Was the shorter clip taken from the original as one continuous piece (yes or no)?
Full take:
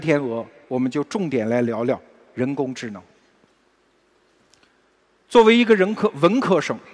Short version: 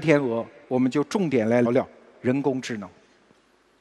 no